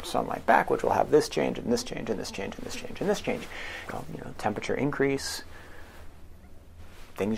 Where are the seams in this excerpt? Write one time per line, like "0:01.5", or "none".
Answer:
0:03.8